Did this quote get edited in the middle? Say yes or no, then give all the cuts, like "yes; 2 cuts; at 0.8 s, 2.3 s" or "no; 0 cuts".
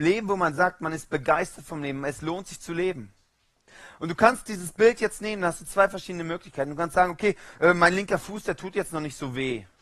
no; 0 cuts